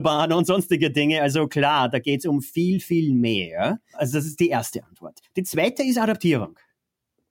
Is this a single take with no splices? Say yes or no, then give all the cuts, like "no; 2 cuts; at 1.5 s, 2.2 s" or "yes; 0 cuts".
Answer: yes; 0 cuts